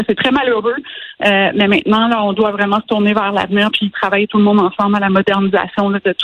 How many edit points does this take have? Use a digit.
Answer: 0